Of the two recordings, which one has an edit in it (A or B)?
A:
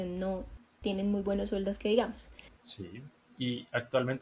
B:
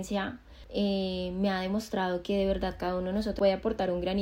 A